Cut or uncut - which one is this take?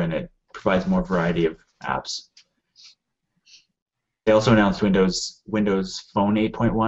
uncut